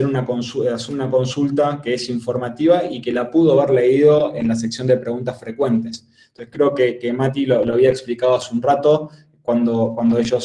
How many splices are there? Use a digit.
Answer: 0